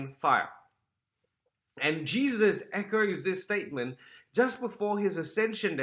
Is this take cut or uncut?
uncut